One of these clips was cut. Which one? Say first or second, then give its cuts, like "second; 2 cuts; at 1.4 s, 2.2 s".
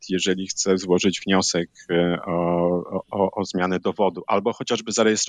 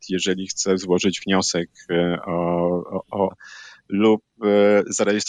second; 1 cut; at 3.3 s